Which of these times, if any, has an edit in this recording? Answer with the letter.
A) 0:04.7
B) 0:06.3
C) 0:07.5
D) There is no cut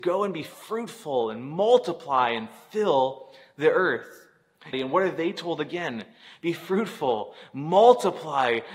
A